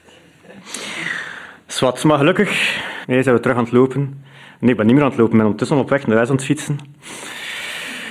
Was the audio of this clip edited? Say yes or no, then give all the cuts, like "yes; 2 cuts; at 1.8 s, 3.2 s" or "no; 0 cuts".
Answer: yes; 1 cut; at 3.0 s